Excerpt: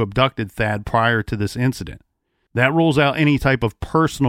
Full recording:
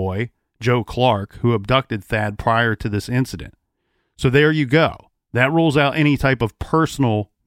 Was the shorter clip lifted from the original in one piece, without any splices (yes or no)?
no